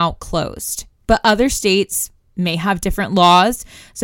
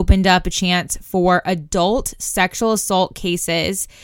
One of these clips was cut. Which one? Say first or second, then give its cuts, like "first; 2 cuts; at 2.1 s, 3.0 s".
first; 1 cut; at 0.9 s